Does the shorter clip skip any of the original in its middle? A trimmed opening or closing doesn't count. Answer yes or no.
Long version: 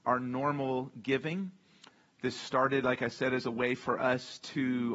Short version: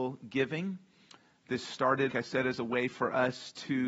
yes